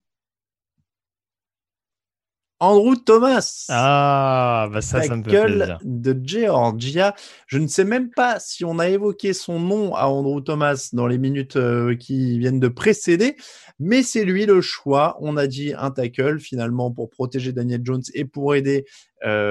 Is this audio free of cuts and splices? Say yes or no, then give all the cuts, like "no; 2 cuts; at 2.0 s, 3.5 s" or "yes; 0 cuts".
yes; 0 cuts